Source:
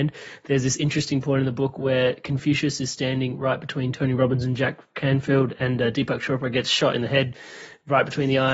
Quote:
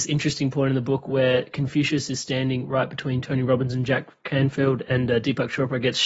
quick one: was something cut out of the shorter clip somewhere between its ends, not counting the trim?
no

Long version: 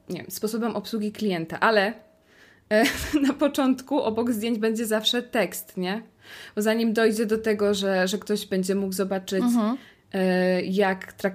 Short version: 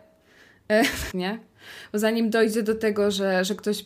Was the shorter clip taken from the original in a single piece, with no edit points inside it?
no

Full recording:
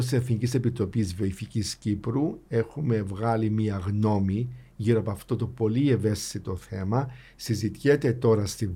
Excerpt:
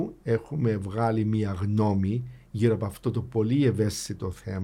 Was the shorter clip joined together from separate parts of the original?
no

